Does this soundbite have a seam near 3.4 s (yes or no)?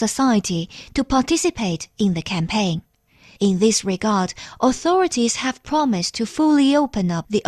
yes